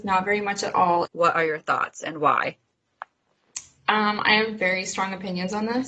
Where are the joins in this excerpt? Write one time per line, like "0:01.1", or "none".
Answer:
0:01.0